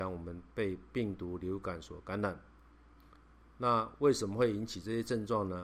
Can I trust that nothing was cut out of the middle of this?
yes; 0 cuts

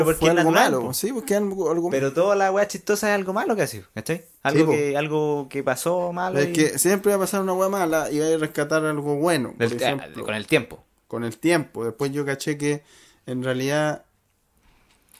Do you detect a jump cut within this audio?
yes; 1 cut; at 1.9 s

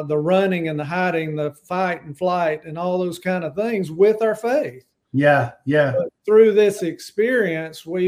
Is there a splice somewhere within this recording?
no; 0 cuts

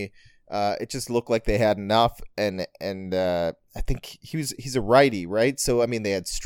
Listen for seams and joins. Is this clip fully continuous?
yes; 0 cuts

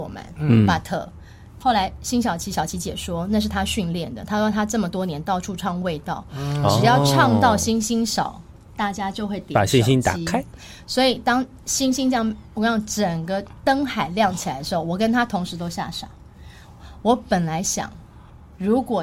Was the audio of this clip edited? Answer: yes; 1 cut; at 1.6 s

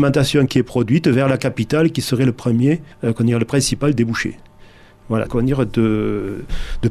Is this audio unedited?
no; 2 cuts; at 2.9 s, 5.3 s

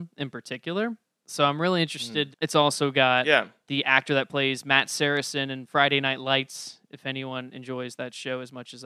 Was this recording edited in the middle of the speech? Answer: yes; 1 cut; at 2.3 s

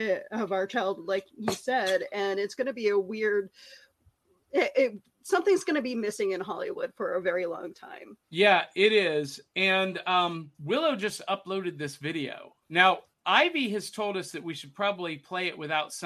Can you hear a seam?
yes; 3 cuts; at 8.2 s, 10.5 s, 12.6 s

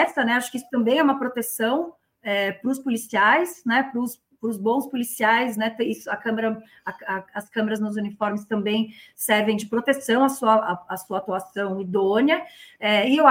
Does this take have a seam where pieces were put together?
no; 0 cuts

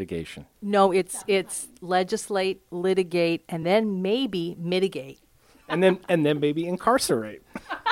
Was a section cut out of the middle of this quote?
no; 0 cuts

